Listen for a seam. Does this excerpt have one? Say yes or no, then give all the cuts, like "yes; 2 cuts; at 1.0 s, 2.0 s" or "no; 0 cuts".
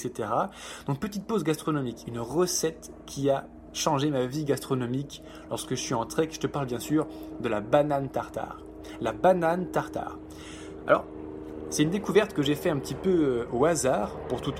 no; 0 cuts